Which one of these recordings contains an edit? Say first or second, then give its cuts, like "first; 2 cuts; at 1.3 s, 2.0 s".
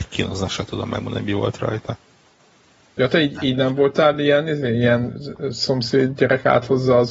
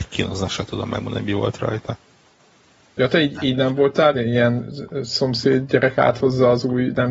second; 1 cut; at 4.1 s